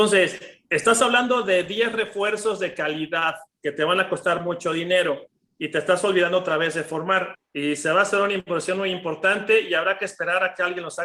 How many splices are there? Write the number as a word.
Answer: one